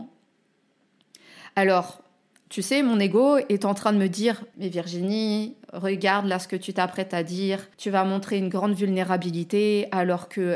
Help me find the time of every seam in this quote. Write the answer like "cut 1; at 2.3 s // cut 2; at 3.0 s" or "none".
cut 1; at 4.5 s // cut 2; at 7.7 s